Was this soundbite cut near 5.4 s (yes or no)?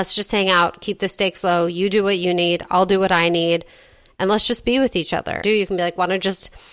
yes